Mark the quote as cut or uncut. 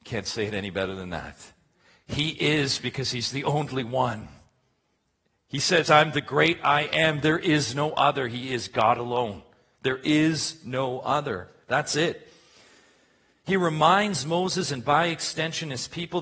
uncut